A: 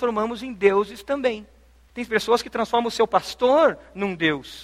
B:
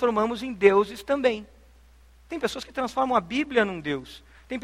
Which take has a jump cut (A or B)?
A